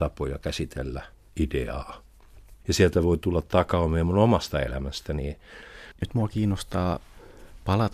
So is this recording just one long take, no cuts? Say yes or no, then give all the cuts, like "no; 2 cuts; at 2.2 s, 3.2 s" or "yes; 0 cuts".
no; 2 cuts; at 2.6 s, 6.0 s